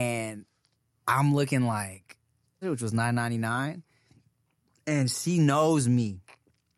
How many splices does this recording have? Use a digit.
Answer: 1